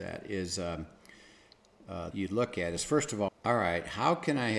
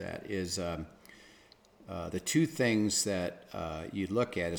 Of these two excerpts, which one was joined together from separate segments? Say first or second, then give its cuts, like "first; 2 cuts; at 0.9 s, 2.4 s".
first; 2 cuts; at 2.1 s, 3.3 s